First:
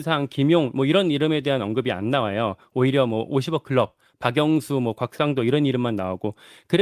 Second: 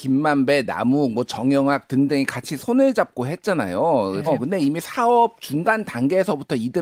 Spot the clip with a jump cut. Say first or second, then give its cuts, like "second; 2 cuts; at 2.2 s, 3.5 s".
second; 1 cut; at 4.3 s